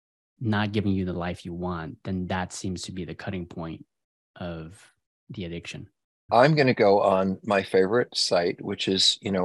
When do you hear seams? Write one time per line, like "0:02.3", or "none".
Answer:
0:06.3